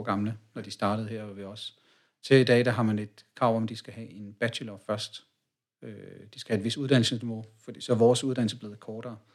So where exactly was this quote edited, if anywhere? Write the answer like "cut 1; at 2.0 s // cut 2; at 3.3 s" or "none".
none